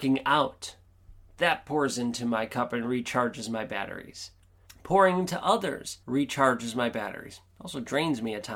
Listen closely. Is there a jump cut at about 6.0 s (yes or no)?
yes